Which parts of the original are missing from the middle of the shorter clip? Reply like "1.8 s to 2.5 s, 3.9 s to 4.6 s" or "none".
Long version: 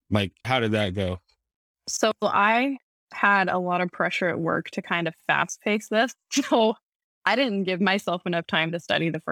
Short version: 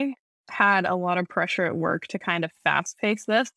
none